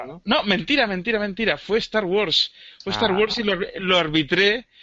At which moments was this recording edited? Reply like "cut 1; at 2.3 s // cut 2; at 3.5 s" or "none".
none